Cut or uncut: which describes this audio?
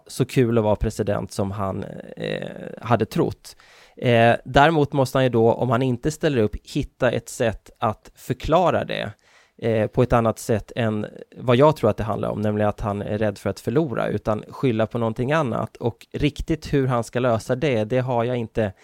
uncut